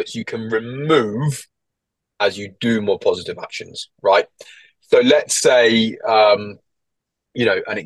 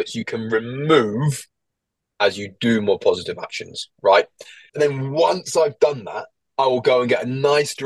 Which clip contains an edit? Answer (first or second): second